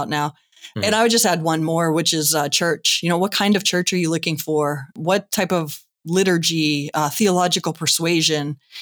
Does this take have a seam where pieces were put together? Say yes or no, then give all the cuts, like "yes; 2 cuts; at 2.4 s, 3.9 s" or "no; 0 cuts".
no; 0 cuts